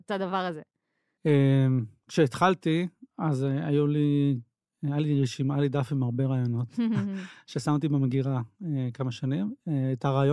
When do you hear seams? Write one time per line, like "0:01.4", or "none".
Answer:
0:01.2